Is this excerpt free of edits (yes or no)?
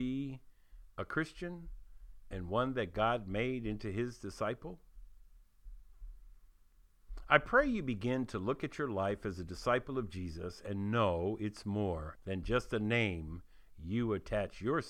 no